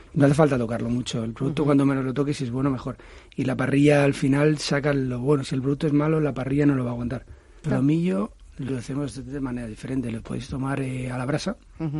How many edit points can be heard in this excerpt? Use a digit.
2